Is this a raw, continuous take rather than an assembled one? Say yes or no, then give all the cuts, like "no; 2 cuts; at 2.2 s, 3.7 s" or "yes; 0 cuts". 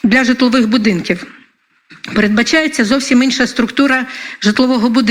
yes; 0 cuts